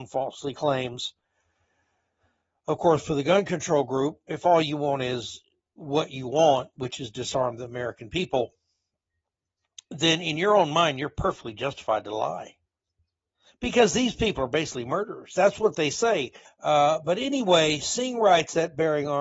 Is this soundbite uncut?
no; 1 cut; at 16.4 s

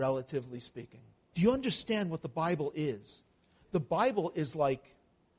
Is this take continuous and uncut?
no; 1 cut; at 1.3 s

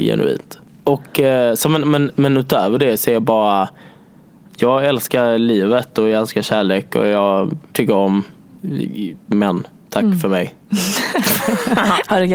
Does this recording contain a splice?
yes; 1 cut; at 7.7 s

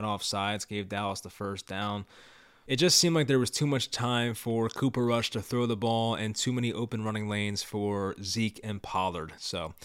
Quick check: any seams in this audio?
yes; 1 cut; at 2.7 s

